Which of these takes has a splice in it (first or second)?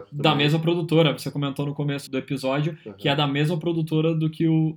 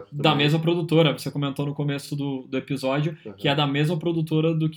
first